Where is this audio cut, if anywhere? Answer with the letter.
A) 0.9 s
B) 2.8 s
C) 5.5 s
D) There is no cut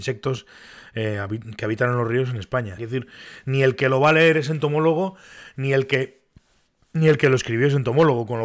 B